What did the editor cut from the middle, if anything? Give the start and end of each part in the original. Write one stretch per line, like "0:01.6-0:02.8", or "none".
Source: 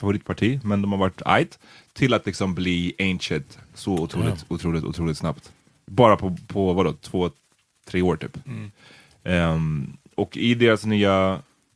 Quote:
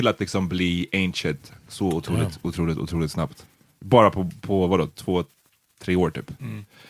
none